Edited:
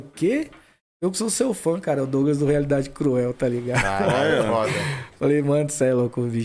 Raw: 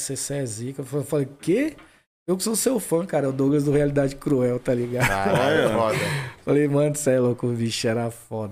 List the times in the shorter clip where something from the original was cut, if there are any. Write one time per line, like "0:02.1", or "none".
none